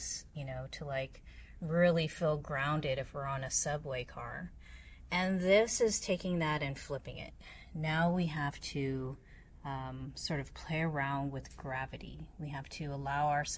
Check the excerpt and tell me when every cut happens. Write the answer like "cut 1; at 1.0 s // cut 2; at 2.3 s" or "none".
none